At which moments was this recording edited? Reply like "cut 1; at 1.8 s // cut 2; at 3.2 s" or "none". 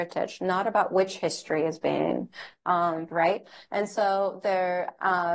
cut 1; at 3.1 s